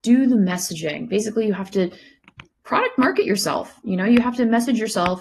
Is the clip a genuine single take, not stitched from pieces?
yes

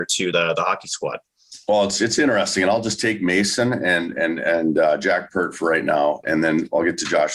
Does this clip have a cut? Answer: no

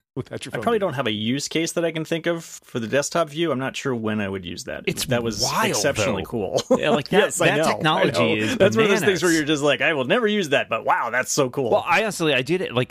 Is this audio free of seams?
no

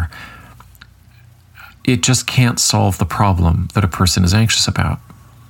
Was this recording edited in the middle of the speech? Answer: yes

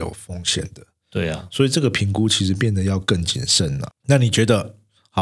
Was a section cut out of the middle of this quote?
yes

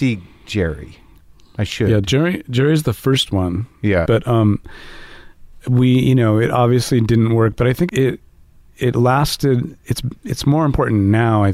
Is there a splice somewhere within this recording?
yes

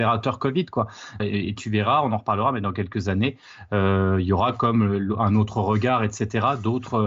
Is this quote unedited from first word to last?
no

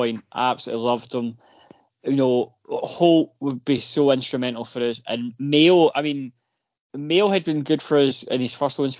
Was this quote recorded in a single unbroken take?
yes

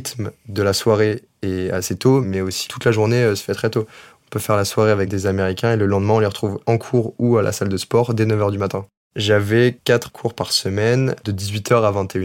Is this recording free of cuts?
yes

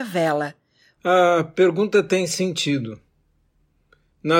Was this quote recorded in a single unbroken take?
no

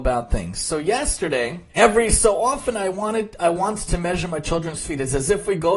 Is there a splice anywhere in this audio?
yes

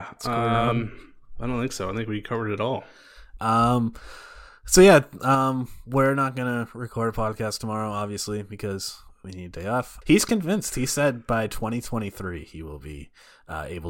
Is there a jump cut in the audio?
yes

